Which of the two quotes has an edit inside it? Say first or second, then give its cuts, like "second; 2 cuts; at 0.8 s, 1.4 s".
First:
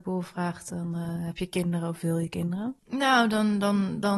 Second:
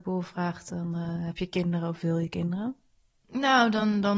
first; 1 cut; at 2.8 s